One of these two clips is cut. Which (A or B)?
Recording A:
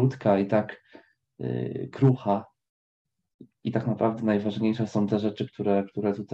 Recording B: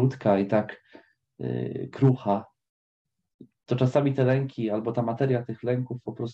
B